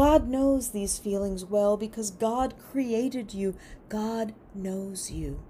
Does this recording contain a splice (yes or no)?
no